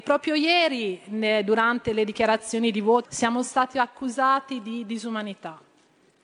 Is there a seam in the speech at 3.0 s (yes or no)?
yes